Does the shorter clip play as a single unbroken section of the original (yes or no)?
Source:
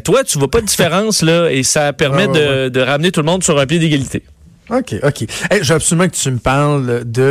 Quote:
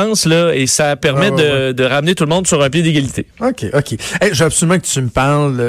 no